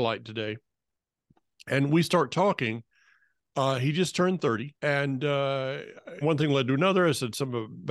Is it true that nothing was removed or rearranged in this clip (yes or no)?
no